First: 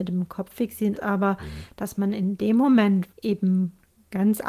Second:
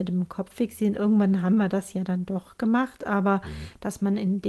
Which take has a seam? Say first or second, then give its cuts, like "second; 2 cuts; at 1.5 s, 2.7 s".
first; 2 cuts; at 0.9 s, 3.1 s